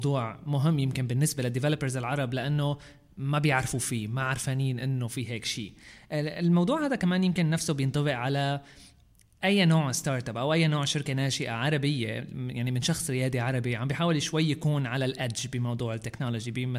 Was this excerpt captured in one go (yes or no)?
yes